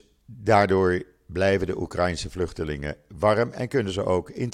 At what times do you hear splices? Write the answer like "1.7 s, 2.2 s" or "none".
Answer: none